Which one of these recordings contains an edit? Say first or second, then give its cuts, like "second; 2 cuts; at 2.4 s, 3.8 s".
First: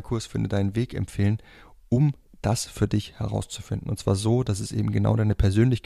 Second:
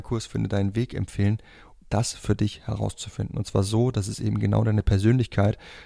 second; 1 cut; at 1.8 s